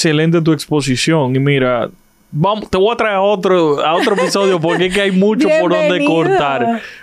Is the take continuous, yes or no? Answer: yes